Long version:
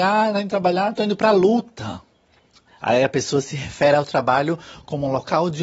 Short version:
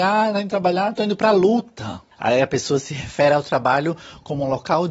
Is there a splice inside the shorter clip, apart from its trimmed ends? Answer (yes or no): yes